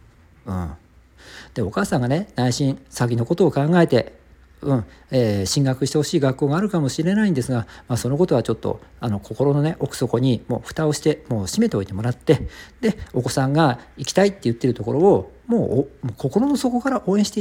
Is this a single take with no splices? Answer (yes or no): yes